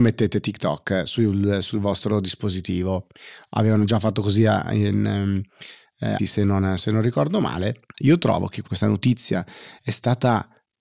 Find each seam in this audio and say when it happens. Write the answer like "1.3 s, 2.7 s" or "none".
6.2 s, 7.9 s